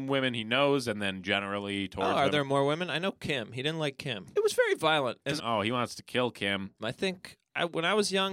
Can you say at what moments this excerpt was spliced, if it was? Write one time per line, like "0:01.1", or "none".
0:04.3
0:05.4
0:06.8